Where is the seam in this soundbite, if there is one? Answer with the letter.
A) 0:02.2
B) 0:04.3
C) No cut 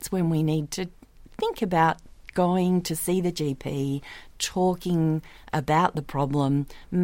C